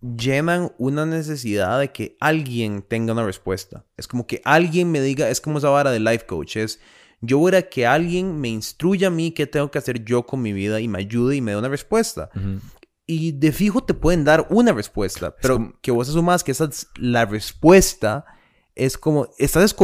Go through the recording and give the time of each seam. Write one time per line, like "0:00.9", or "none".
0:04.0